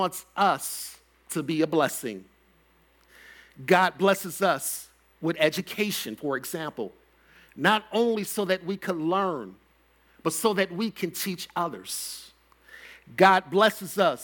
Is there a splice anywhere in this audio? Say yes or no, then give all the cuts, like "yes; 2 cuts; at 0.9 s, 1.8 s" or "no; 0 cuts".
no; 0 cuts